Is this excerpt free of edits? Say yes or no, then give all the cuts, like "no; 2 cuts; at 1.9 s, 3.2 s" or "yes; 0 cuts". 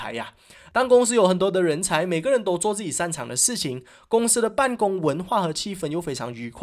yes; 0 cuts